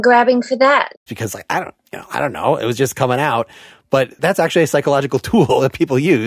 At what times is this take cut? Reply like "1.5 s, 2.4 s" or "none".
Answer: 1.1 s